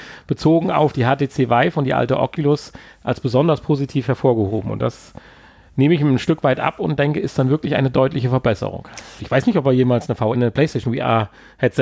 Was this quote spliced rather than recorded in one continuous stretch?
yes; 2 cuts; at 9.2 s, 10.3 s

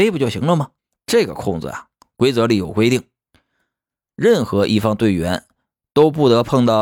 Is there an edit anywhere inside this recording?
no; 0 cuts

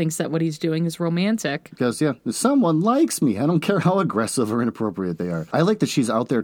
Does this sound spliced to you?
no; 0 cuts

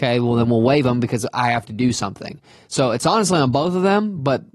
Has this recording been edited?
no; 0 cuts

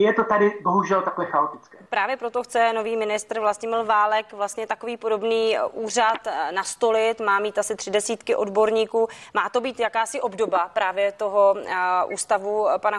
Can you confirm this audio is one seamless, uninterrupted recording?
yes; 0 cuts

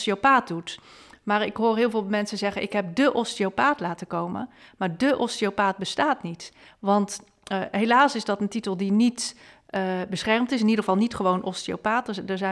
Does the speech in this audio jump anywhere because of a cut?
no; 0 cuts

